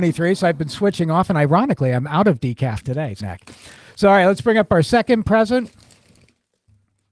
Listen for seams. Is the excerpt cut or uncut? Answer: cut